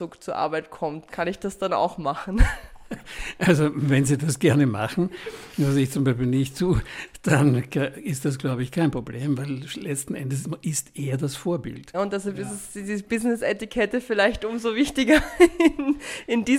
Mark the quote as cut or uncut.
cut